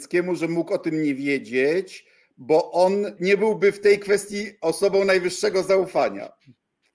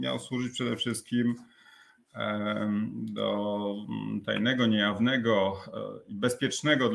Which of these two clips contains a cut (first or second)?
first